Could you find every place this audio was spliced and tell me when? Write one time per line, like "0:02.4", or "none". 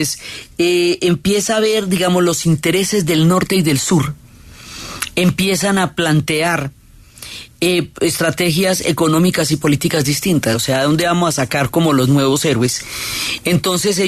0:10.5